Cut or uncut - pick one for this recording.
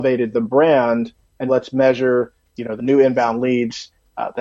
cut